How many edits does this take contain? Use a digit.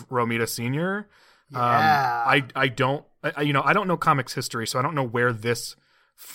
0